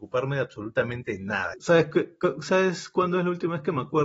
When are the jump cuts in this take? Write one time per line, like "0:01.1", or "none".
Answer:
0:01.5